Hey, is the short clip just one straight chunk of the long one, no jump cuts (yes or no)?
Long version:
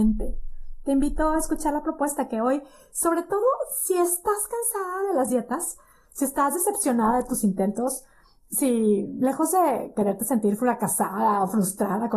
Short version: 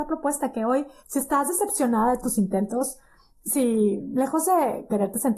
no